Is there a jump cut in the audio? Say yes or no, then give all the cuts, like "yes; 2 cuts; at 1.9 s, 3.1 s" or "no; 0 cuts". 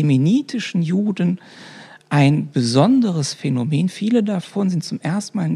no; 0 cuts